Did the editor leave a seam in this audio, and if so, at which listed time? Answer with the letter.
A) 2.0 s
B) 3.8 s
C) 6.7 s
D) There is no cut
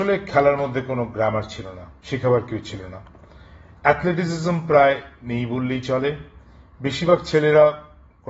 A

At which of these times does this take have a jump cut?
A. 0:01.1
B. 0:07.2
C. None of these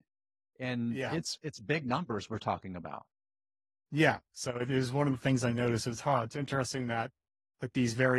C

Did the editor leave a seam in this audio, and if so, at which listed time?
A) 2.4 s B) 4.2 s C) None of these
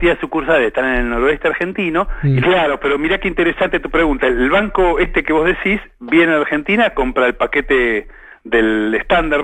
A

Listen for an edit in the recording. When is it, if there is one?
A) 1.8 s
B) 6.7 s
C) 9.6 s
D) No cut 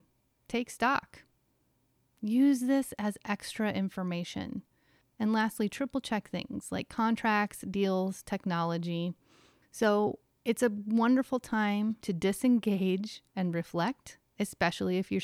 C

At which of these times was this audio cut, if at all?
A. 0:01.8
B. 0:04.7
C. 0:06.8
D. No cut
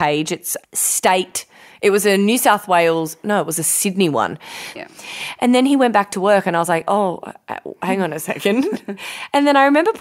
B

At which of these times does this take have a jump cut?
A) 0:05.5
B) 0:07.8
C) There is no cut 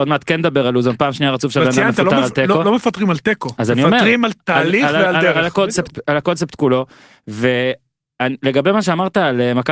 C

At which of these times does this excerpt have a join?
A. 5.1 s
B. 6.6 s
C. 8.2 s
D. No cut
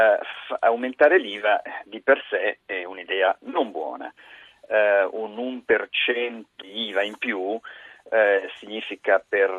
B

